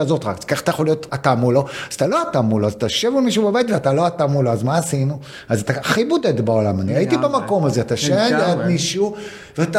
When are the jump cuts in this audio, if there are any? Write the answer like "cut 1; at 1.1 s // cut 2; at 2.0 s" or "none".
cut 1; at 1.1 s